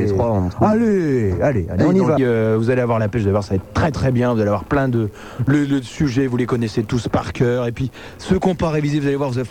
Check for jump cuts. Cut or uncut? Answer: cut